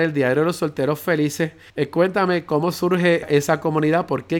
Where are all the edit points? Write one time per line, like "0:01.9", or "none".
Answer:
0:01.7
0:03.2